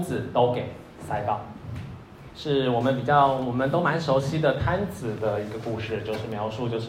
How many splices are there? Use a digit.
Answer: 1